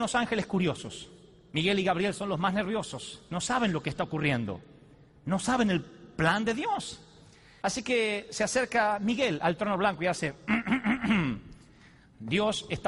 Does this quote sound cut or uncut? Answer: uncut